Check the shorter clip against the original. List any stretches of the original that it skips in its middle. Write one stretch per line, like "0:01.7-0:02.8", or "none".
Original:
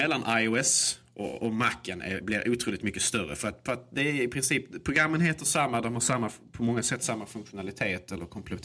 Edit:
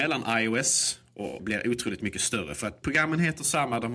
0:01.4-0:02.2
0:03.6-0:04.8